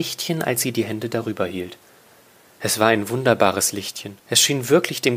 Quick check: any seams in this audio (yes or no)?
yes